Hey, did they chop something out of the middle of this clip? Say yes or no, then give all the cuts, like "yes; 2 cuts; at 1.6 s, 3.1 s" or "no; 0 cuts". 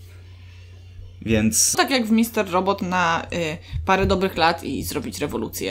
yes; 1 cut; at 1.7 s